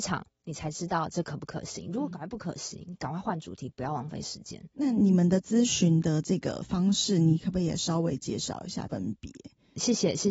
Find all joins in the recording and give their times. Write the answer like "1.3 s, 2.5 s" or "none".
8.9 s